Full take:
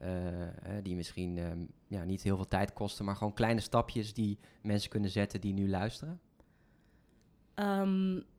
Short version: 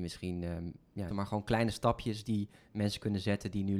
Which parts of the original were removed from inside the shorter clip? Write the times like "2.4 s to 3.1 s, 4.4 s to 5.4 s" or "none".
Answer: 2.0 s to 3.0 s